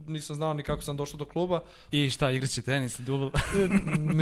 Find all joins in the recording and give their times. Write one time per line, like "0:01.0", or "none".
0:01.9